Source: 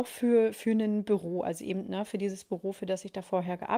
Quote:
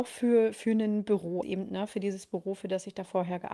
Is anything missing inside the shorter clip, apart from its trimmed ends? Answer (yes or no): yes